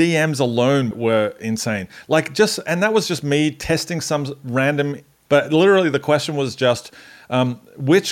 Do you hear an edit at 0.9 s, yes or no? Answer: yes